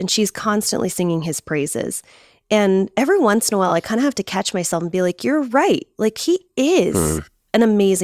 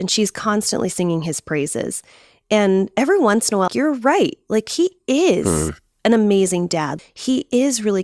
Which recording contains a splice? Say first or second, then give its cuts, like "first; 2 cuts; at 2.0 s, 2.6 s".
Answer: second; 2 cuts; at 3.7 s, 7.0 s